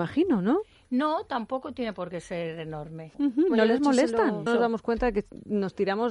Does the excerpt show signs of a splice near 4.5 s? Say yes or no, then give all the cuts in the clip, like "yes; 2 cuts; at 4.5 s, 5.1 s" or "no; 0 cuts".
yes; 2 cuts; at 3.1 s, 4.5 s